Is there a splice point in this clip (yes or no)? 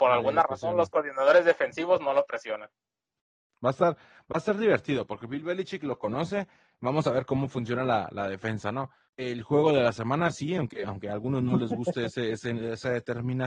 yes